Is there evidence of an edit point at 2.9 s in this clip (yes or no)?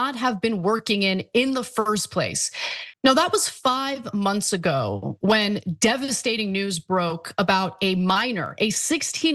yes